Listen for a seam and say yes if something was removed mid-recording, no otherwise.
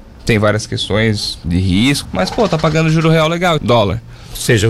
yes